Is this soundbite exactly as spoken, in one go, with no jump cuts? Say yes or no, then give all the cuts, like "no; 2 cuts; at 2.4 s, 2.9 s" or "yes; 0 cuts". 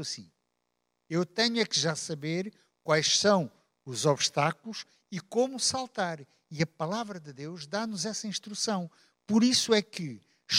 yes; 0 cuts